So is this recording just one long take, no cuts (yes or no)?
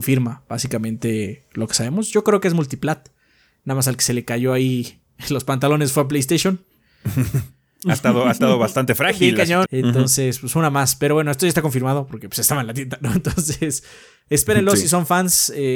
no